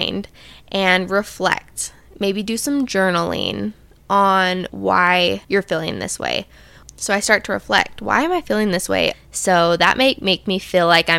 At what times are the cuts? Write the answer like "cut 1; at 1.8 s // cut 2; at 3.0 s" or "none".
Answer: cut 1; at 6.8 s // cut 2; at 9.1 s